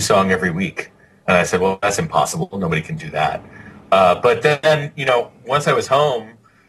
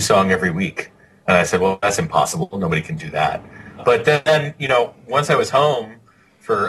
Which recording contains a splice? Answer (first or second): second